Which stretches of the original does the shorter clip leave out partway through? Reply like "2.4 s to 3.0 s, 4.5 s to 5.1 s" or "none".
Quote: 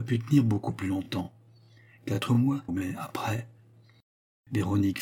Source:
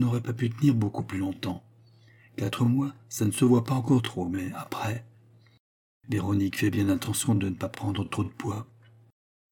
3.0 s to 4.3 s